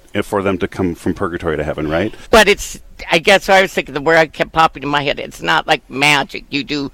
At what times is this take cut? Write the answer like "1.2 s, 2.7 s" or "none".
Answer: 2.2 s